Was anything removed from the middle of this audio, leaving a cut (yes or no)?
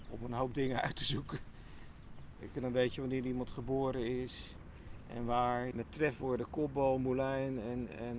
yes